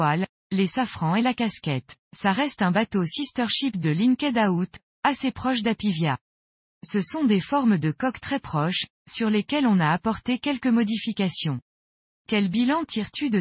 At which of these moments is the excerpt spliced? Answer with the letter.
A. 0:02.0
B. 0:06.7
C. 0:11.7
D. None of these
A